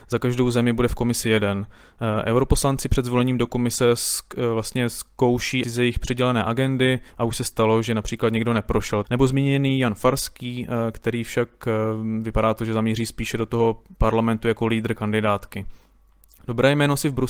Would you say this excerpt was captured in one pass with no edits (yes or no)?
no